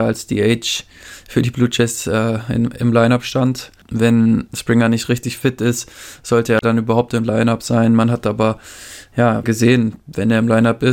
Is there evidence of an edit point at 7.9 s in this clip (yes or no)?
no